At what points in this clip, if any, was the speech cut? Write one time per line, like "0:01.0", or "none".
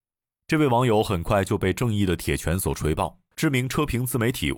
0:03.3